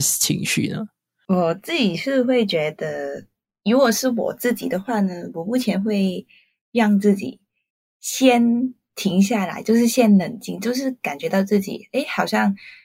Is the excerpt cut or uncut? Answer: uncut